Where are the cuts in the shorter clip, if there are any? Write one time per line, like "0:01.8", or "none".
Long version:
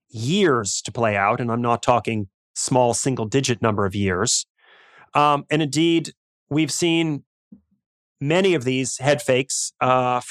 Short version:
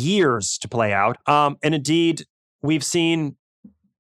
0:01.1